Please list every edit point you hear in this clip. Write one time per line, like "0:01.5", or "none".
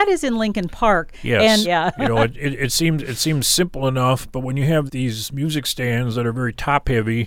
0:01.6
0:04.9